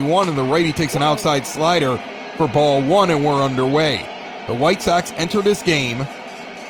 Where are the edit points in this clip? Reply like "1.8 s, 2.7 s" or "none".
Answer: none